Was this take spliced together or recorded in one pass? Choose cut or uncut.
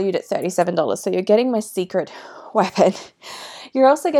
uncut